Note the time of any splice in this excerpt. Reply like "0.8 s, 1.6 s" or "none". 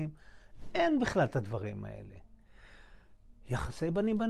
none